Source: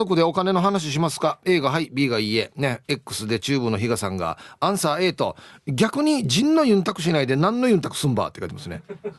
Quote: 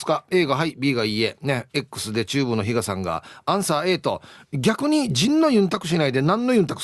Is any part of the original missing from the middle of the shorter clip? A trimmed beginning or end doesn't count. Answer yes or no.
no